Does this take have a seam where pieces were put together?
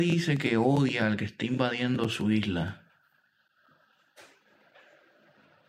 no; 0 cuts

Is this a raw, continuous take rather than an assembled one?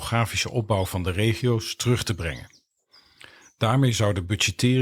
yes; 0 cuts

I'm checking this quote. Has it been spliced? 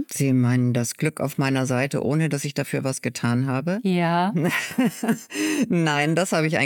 no; 0 cuts

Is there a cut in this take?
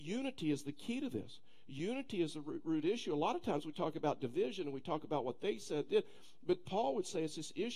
no; 0 cuts

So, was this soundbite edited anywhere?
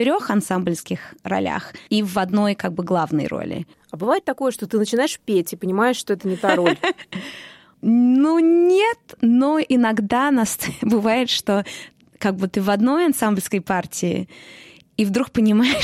no; 0 cuts

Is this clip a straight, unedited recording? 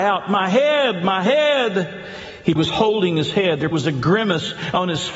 no; 2 cuts; at 2.6 s, 3.7 s

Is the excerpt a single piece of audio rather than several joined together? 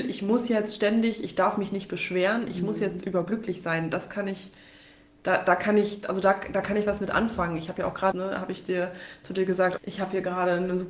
no; 2 cuts; at 8.1 s, 9.8 s

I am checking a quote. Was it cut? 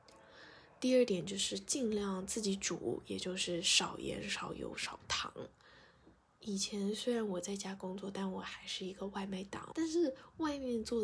yes; 1 cut; at 9.7 s

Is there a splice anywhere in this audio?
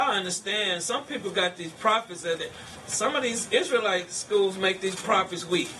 yes; 1 cut; at 2.4 s

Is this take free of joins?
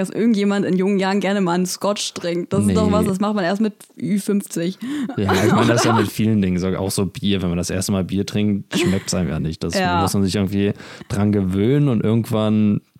yes; 0 cuts

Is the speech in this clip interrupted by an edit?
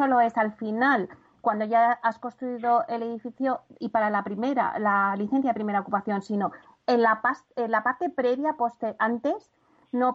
no; 0 cuts

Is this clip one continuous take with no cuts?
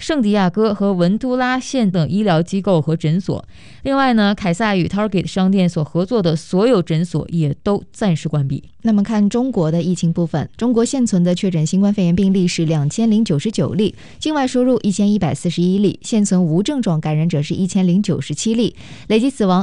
no; 1 cut; at 1.9 s

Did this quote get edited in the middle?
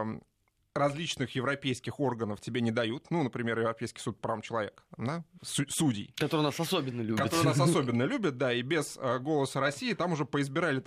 no; 0 cuts

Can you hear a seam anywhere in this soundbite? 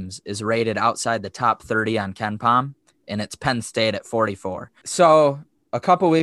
yes; 1 cut; at 4.8 s

